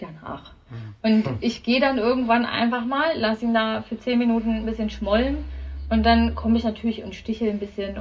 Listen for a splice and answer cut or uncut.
uncut